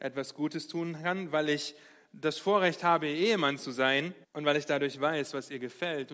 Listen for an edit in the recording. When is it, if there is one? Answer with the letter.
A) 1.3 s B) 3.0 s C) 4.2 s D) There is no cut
C